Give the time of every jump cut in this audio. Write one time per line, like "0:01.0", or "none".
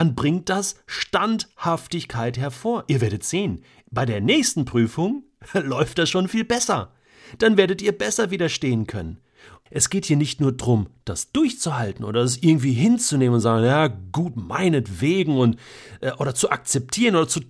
0:09.7